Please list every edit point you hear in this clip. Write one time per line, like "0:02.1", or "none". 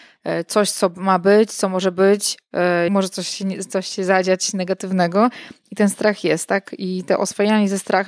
0:02.9